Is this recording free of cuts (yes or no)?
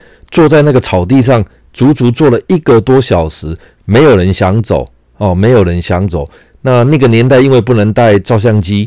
yes